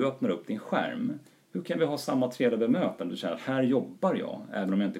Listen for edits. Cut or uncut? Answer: uncut